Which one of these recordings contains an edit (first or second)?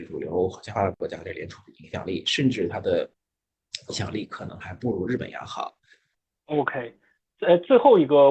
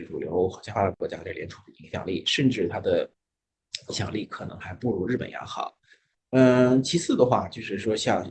first